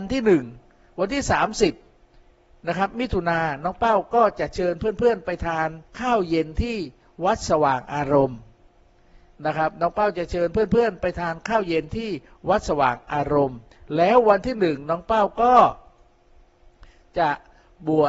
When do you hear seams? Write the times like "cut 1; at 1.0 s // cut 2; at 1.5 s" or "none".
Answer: cut 1; at 5.9 s